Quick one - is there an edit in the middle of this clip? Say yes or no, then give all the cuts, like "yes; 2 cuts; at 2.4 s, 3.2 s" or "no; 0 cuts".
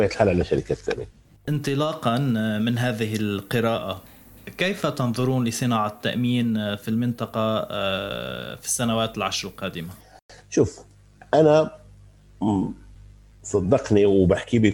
no; 0 cuts